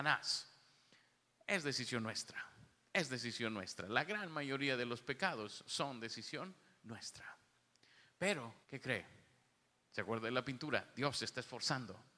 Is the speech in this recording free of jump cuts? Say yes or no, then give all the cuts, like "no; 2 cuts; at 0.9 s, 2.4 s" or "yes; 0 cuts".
no; 1 cut; at 8.6 s